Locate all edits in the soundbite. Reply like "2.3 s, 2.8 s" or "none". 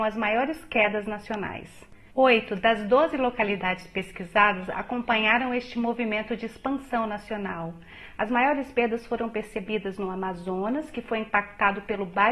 2.1 s, 8.2 s